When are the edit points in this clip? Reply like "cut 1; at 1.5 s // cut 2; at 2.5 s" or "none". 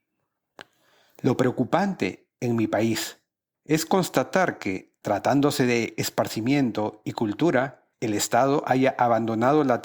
cut 1; at 3.5 s // cut 2; at 7.9 s